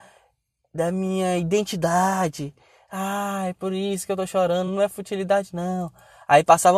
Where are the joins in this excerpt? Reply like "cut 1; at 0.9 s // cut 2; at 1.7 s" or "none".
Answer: none